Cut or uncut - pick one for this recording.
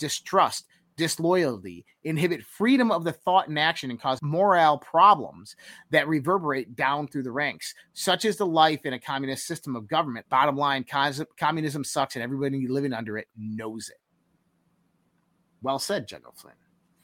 cut